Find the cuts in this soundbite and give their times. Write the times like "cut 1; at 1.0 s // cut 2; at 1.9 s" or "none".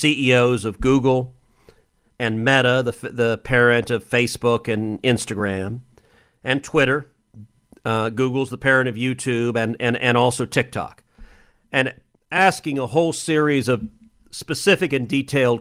none

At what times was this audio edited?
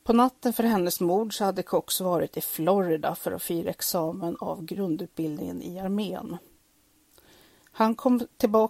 none

